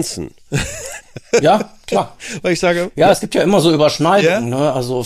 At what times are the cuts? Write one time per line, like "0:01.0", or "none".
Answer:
none

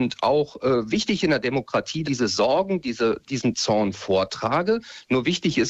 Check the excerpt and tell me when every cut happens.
0:02.0
0:03.2

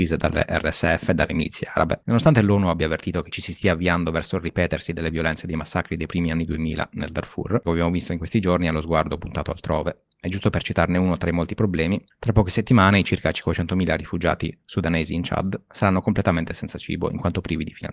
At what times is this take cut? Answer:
0:07.6

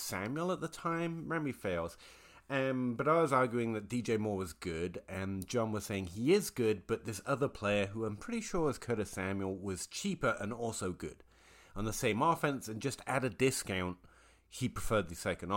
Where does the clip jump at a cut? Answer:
none

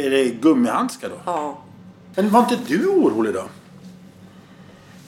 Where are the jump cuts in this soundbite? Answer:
0:02.1

